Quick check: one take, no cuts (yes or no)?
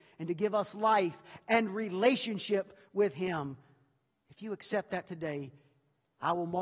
yes